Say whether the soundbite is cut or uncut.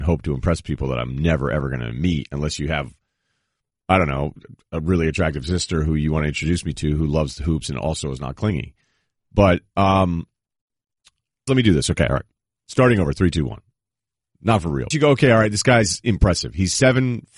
cut